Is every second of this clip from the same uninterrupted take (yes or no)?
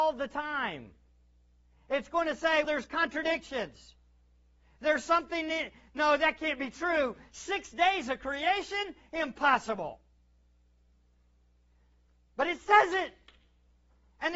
no